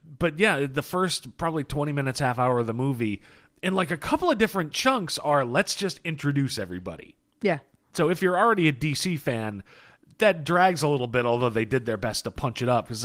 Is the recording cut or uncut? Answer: uncut